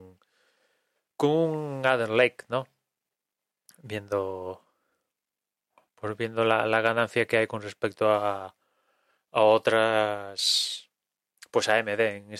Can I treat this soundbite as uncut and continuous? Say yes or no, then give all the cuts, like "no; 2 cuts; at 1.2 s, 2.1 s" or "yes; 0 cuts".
yes; 0 cuts